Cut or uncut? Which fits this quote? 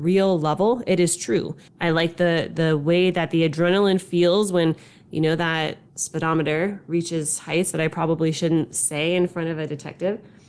cut